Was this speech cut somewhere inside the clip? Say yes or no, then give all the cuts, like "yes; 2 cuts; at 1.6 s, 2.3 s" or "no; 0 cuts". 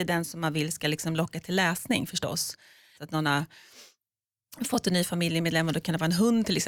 yes; 1 cut; at 2.9 s